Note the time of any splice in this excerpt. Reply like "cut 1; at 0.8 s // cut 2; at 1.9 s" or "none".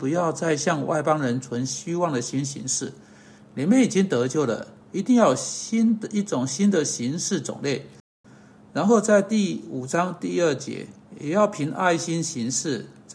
cut 1; at 8.2 s